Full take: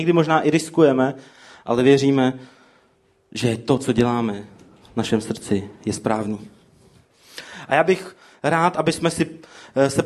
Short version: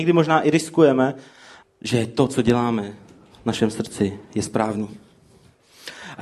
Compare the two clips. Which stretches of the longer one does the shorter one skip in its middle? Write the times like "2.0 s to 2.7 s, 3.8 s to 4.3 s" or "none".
1.6 s to 3.1 s